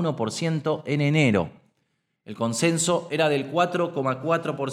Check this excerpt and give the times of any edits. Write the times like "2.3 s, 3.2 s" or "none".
none

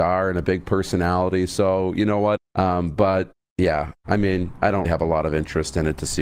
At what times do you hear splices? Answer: 2.4 s, 4.8 s

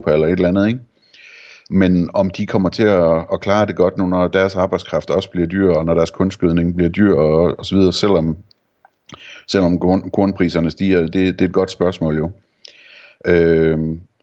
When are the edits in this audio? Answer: none

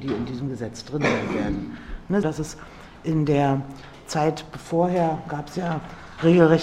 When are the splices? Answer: 2.2 s

